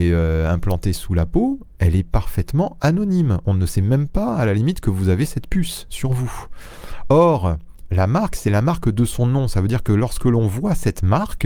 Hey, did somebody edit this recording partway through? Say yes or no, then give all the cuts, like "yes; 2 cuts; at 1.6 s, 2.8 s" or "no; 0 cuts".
no; 0 cuts